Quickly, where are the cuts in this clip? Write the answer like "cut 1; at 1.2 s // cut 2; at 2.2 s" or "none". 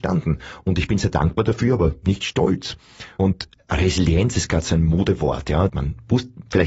cut 1; at 5.7 s

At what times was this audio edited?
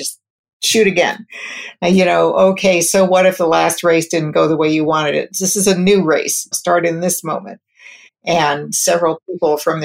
cut 1; at 6.5 s // cut 2; at 8.1 s

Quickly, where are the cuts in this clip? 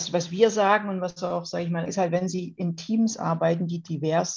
cut 1; at 1.9 s

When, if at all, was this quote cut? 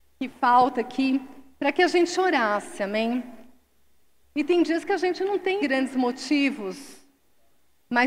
cut 1; at 4.2 s // cut 2; at 5.6 s

